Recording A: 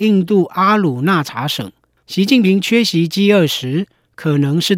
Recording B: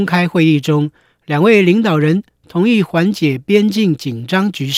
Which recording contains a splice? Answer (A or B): A